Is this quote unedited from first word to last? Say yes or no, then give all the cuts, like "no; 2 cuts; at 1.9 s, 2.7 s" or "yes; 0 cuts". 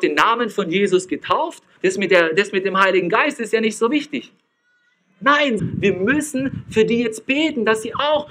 no; 2 cuts; at 1.8 s, 5.6 s